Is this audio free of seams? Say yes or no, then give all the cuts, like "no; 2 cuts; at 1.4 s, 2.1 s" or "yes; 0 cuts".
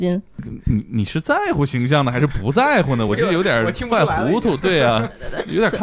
yes; 0 cuts